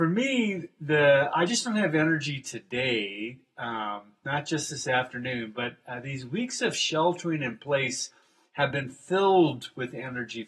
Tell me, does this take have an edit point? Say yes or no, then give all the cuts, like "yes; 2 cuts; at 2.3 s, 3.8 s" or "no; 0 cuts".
no; 0 cuts